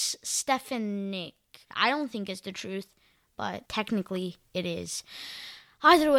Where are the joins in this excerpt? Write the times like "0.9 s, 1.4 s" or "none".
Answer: 1.7 s, 3.7 s